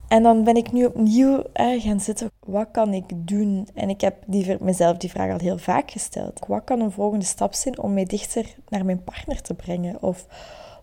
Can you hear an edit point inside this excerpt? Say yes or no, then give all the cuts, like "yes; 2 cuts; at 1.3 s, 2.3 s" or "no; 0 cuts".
yes; 2 cuts; at 2.3 s, 6.4 s